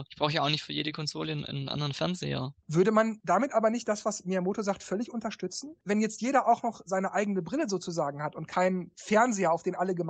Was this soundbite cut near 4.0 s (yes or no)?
no